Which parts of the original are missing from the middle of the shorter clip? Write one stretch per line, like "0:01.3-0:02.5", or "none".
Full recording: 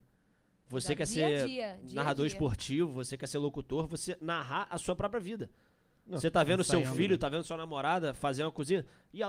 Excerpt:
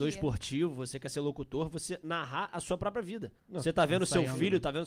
0:05.6-0:06.0